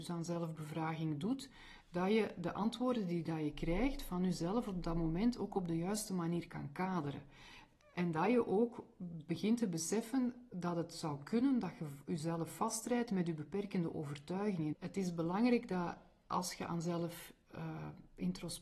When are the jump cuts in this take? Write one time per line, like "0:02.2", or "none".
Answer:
0:14.7